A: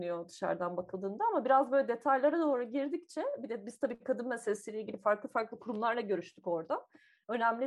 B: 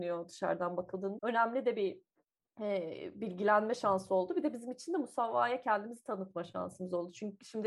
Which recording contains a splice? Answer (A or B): B